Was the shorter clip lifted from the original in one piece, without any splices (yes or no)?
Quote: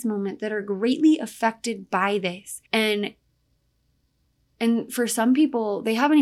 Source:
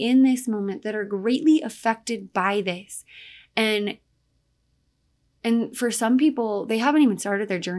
no